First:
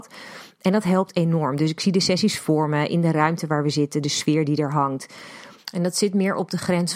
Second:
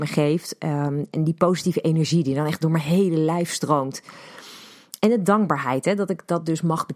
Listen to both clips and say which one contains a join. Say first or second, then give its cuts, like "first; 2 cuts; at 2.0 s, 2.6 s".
first; 2 cuts; at 4.0 s, 5.6 s